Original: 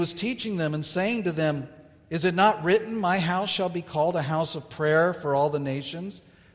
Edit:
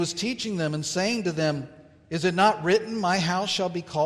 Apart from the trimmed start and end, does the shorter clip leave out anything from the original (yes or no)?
no